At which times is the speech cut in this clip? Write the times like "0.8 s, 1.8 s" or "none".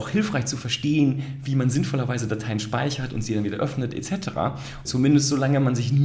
4.8 s